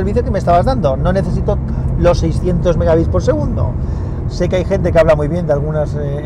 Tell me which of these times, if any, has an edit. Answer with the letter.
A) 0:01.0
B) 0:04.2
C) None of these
B